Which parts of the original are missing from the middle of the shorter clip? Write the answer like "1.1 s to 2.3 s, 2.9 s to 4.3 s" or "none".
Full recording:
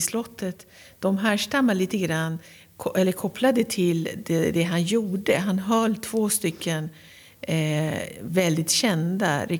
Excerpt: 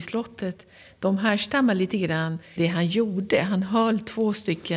2.6 s to 4.5 s

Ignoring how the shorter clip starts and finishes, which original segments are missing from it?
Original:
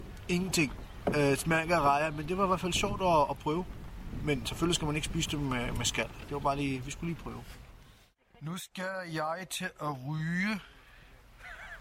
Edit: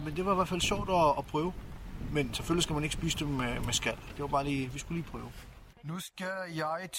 7.8 s to 8.3 s

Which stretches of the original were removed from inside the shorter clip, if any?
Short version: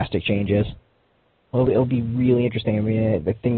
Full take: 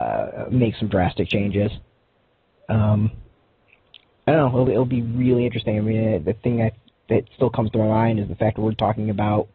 2.6 s to 4.5 s

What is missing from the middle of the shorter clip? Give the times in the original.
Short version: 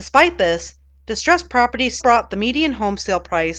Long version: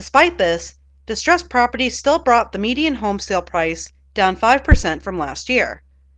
2.0 s to 2.2 s

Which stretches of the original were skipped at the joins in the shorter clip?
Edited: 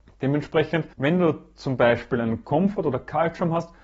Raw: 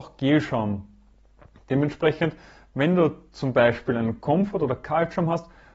2.4 s to 2.7 s

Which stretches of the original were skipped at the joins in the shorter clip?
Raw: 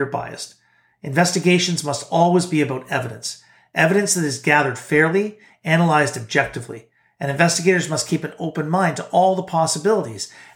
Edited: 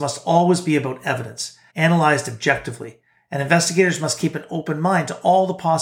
3.6 s to 5.6 s

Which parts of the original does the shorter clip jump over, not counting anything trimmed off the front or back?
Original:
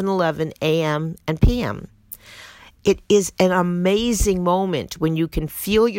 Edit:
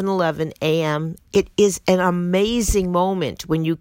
1.2 s to 2.7 s

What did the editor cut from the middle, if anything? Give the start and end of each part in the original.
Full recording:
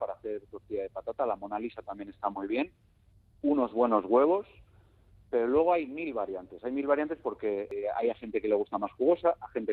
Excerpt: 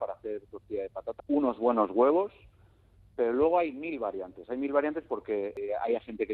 1.2 s to 3.3 s

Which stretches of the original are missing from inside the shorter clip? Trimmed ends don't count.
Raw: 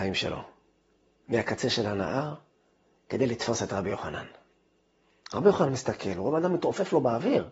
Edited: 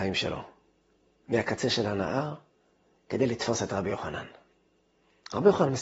none

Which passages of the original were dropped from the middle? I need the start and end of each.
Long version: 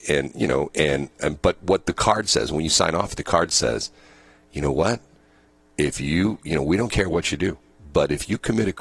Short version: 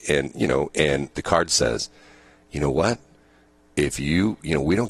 1.1 s to 3.1 s

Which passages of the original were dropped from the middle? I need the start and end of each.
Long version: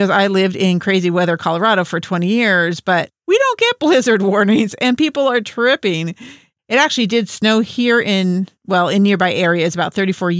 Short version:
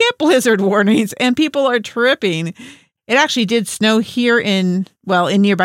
none

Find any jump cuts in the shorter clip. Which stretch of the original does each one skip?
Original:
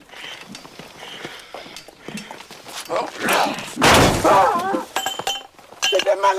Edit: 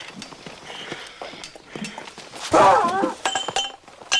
2.8 s to 4.2 s

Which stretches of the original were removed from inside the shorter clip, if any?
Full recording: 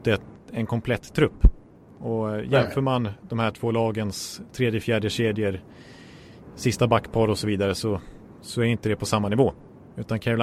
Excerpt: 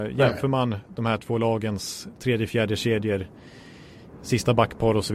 none

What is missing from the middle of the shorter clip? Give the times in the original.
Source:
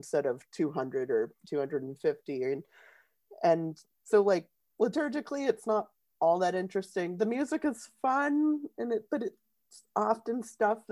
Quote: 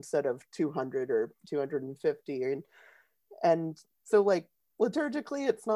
none

